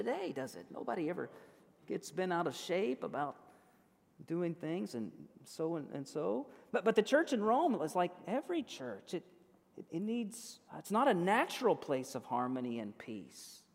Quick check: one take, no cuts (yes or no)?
no